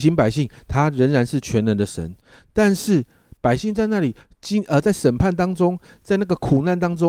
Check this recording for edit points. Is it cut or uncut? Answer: uncut